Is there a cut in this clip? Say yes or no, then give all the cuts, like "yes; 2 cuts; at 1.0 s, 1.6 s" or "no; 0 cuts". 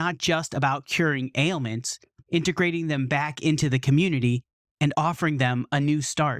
yes; 1 cut; at 2.2 s